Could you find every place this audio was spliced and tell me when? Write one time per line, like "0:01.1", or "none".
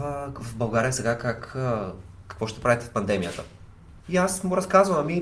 0:04.0